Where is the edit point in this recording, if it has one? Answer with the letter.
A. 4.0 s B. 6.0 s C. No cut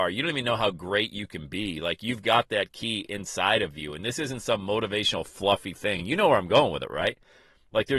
C